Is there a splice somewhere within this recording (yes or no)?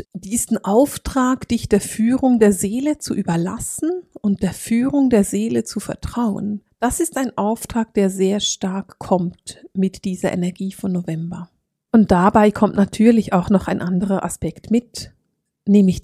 no